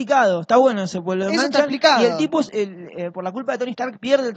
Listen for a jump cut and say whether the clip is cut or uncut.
uncut